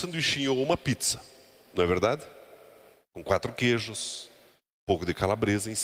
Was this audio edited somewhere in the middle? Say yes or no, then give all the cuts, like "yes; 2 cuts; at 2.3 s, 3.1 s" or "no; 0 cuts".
no; 0 cuts